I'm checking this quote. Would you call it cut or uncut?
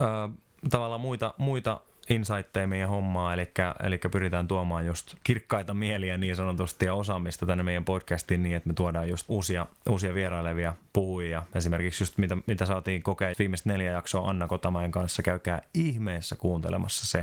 cut